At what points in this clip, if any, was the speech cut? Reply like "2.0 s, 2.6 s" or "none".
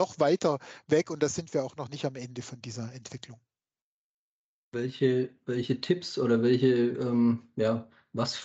none